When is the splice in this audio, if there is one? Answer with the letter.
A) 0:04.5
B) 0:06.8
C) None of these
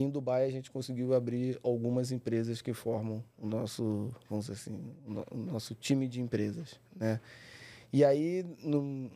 C